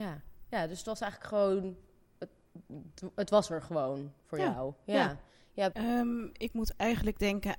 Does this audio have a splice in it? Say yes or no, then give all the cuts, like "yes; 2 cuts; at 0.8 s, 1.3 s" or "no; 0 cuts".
yes; 1 cut; at 5.7 s